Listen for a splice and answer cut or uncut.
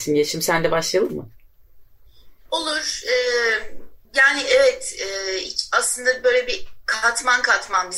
cut